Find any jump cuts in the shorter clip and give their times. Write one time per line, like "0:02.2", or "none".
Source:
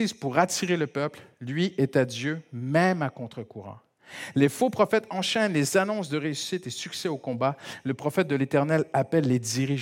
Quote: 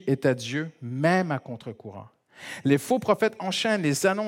none